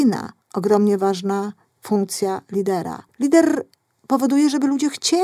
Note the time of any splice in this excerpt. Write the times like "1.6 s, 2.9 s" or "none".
3.1 s

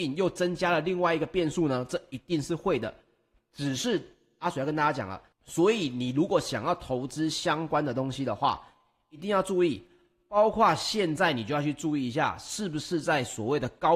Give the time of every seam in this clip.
5.3 s

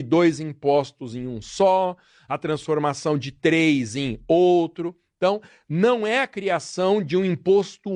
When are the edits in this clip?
none

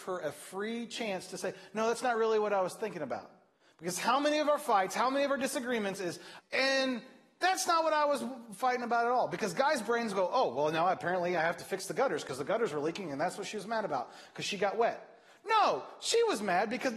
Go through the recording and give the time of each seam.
6.4 s

